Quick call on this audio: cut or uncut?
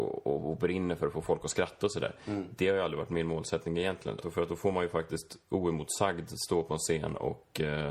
cut